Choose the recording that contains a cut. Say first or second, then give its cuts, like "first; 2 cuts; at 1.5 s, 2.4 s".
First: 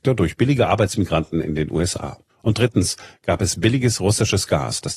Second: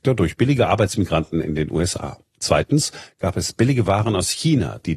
first; 1 cut; at 2.3 s